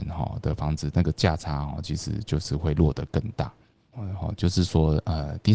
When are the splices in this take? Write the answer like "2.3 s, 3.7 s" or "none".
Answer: 3.9 s